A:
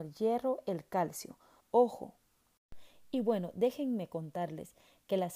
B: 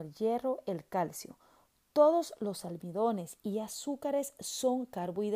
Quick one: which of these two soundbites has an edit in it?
A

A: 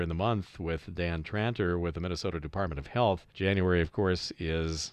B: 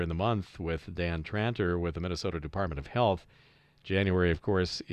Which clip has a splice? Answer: A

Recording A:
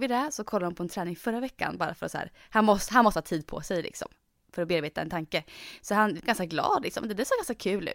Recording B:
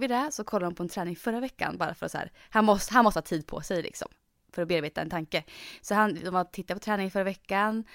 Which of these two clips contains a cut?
A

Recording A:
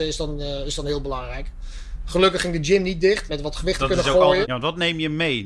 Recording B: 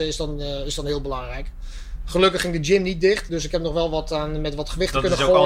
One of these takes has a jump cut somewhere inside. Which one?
A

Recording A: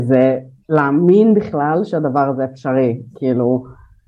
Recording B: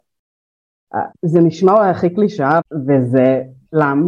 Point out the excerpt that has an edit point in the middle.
B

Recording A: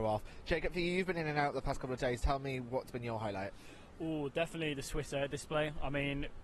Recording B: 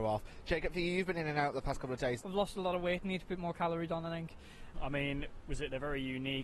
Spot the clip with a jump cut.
B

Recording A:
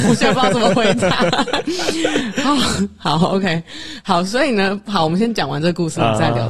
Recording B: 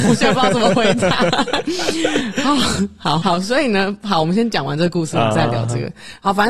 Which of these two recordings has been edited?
B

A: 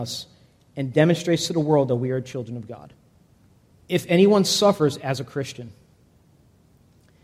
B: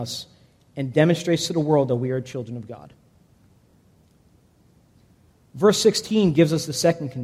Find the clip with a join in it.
A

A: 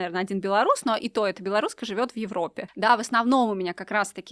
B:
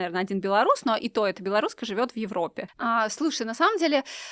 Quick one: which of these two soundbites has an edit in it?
B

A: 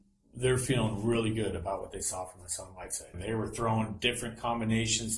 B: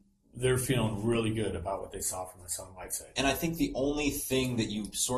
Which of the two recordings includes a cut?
A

